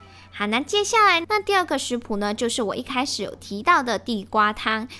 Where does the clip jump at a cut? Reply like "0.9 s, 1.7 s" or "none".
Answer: 1.2 s

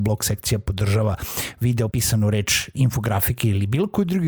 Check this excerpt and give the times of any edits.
1.9 s

